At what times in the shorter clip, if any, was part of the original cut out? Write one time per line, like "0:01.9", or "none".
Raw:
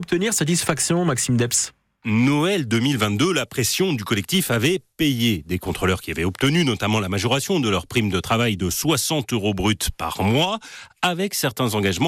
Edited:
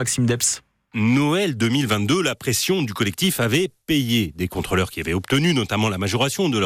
none